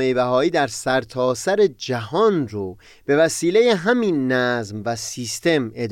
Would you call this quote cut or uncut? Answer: uncut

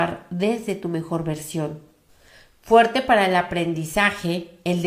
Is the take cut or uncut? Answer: uncut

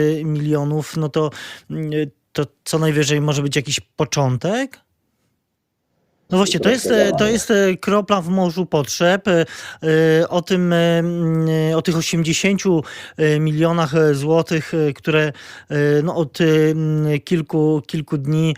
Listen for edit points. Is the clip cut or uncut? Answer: cut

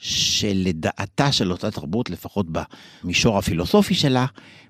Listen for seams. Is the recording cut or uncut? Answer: uncut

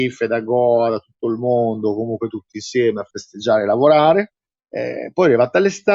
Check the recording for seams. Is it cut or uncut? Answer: cut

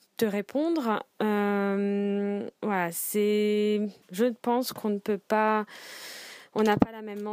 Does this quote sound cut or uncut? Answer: cut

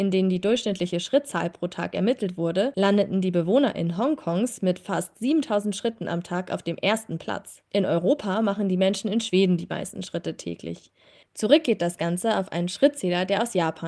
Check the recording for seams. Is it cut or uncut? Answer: cut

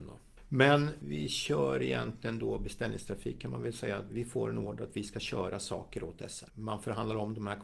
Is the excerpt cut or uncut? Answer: cut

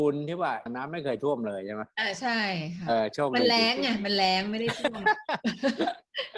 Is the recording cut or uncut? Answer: cut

